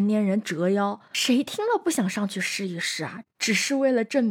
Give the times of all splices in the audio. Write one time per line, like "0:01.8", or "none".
none